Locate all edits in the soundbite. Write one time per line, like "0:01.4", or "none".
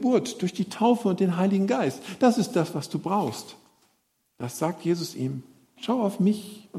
none